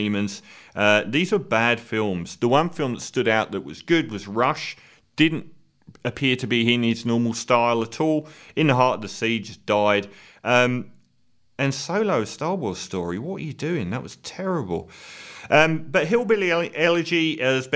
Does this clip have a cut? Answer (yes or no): no